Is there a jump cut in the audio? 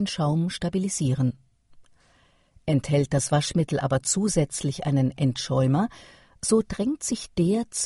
no; 0 cuts

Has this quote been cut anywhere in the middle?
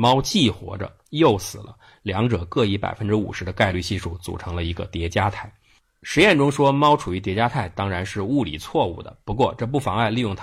no; 0 cuts

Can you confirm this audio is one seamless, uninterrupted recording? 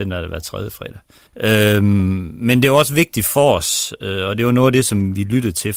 no; 1 cut; at 1.3 s

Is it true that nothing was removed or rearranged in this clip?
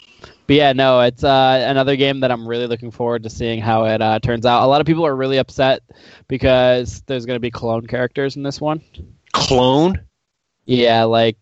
yes; 0 cuts

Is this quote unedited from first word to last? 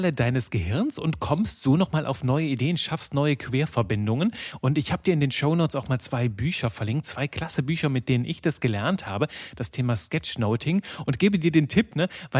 yes; 0 cuts

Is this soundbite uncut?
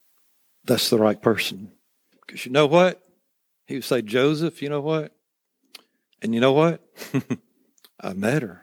no; 2 cuts; at 2.1 s, 6.1 s

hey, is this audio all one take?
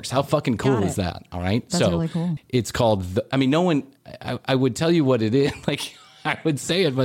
no; 1 cut; at 2.4 s

